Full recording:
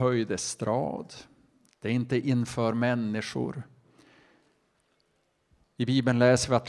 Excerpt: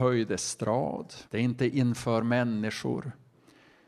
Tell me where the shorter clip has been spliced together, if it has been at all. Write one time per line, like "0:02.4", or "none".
0:01.3